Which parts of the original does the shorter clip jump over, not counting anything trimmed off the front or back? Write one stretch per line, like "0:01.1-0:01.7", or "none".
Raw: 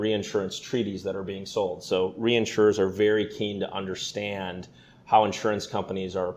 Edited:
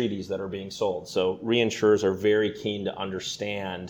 none